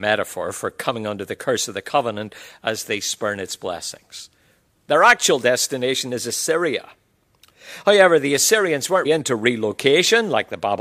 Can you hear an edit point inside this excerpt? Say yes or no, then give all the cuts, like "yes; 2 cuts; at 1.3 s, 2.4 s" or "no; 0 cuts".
yes; 1 cut; at 9.0 s